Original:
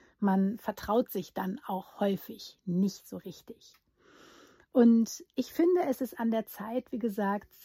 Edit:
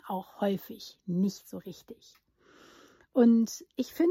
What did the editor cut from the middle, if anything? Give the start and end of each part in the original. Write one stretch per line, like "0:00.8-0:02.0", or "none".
none